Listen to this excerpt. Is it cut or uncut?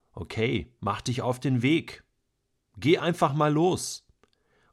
uncut